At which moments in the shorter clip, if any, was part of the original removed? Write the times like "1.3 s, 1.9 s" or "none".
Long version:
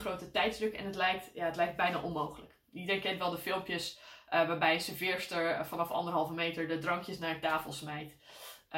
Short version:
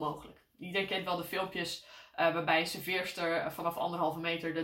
none